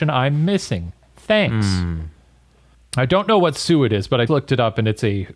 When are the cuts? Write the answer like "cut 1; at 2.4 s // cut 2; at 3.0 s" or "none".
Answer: cut 1; at 4.3 s